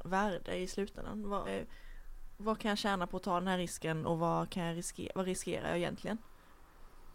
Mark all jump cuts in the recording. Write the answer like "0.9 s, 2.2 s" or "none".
1.4 s